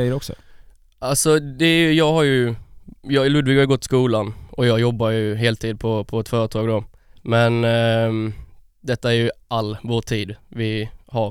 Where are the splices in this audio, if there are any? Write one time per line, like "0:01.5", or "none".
none